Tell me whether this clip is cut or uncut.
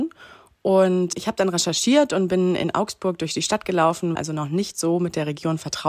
cut